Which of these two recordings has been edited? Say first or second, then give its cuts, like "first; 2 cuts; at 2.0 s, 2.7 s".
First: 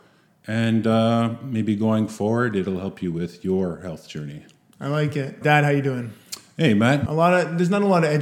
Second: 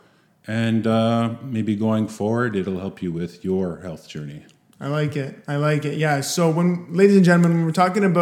first; 2 cuts; at 5.4 s, 7.0 s